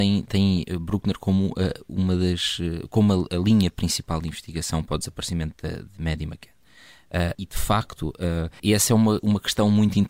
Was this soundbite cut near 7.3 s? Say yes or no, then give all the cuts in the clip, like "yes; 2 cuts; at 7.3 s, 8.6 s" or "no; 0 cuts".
yes; 2 cuts; at 7.3 s, 8.6 s